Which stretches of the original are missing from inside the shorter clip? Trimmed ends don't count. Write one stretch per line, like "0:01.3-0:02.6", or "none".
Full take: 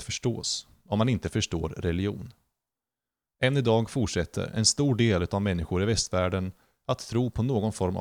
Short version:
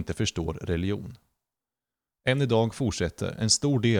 none